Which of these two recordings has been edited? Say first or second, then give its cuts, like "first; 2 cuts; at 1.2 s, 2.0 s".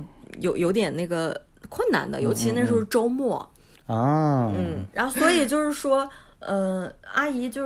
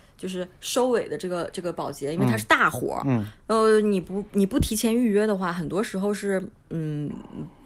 first; 2 cuts; at 3.7 s, 4.9 s